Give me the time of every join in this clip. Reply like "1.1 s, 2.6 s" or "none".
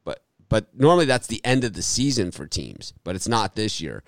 none